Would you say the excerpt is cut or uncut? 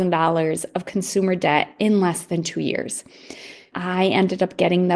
cut